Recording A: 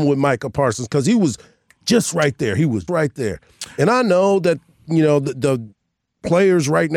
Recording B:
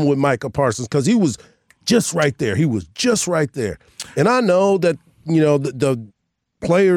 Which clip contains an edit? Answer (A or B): A